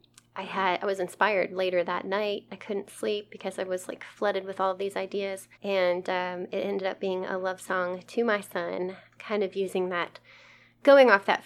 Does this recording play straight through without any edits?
no; 2 cuts; at 5.5 s, 9.2 s

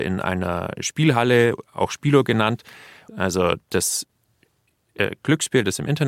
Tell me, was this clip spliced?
yes; 1 cut; at 3.1 s

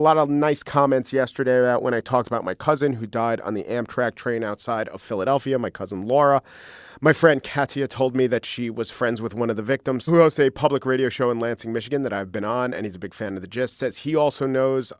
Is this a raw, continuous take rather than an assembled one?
no; 1 cut; at 10.1 s

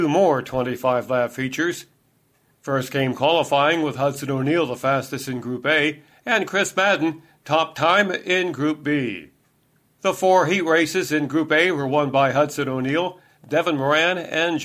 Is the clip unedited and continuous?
no; 1 cut; at 13.4 s

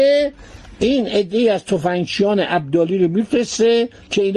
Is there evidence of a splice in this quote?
no; 0 cuts

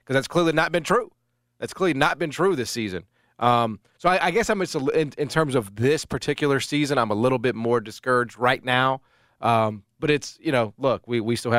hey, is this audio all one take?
yes; 0 cuts

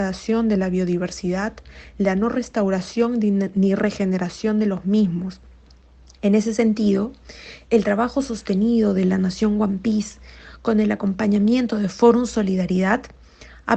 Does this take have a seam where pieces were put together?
no; 0 cuts

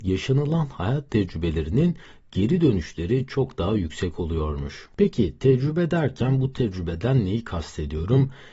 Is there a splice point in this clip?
no; 0 cuts

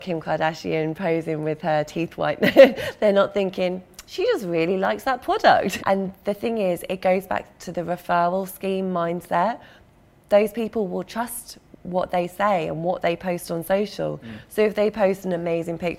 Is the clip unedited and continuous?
no; 1 cut; at 5.8 s

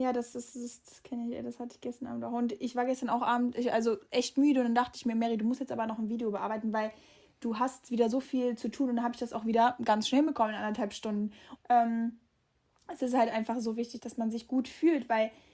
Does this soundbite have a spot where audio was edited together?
yes; 2 cuts; at 11.6 s, 14.0 s

